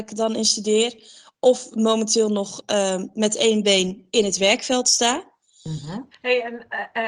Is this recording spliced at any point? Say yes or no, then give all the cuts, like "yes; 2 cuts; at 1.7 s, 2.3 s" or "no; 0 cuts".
yes; 1 cut; at 6.1 s